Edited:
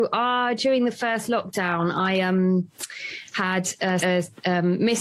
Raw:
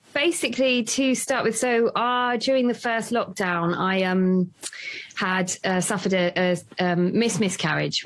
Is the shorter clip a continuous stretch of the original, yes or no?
no